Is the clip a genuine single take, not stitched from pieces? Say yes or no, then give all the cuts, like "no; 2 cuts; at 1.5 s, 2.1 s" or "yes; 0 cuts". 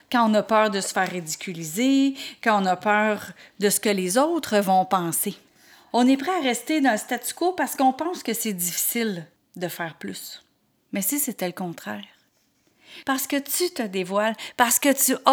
no; 3 cuts; at 5.9 s, 10.9 s, 13.0 s